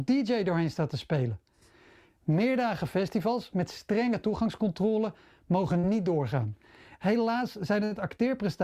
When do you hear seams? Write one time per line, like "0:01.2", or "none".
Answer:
0:02.1
0:07.0